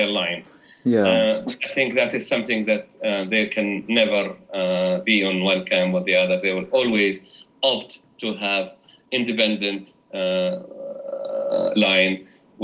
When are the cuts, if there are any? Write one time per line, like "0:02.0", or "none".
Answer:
none